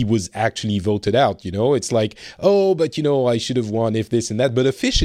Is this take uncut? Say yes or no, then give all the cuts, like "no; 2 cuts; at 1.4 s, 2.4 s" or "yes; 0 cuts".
yes; 0 cuts